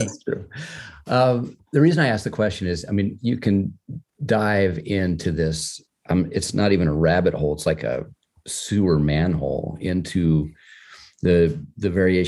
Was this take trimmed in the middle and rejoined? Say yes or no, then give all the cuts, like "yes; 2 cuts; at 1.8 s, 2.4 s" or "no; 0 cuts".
no; 0 cuts